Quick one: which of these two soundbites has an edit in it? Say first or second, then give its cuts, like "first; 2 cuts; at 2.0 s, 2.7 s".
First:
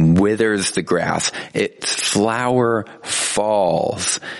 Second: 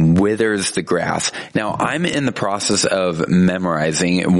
second; 1 cut; at 1.5 s